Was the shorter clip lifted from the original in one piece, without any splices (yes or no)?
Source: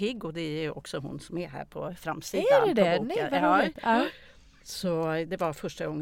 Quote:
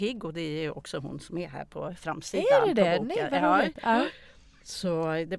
yes